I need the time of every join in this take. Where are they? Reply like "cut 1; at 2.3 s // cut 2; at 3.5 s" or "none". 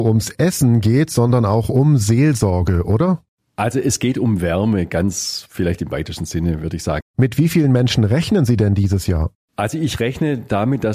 cut 1; at 7.0 s